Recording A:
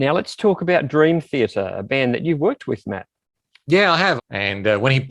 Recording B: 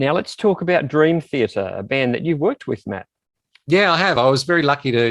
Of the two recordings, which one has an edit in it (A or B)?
A